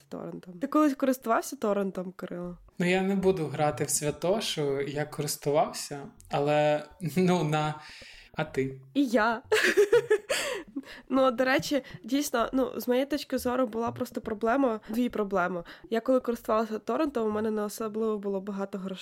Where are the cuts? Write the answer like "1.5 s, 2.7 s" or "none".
2.7 s, 8.3 s